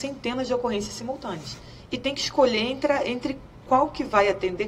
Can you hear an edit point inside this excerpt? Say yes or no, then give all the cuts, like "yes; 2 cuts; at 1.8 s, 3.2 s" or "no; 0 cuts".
no; 0 cuts